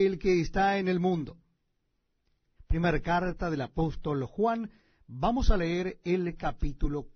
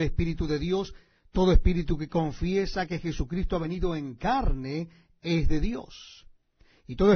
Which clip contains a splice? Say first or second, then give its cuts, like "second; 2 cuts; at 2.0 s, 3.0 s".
first; 1 cut; at 2.6 s